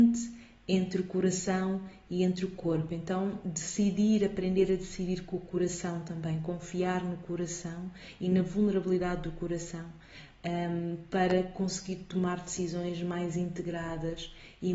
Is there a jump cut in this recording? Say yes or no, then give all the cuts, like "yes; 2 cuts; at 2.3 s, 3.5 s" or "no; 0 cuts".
no; 0 cuts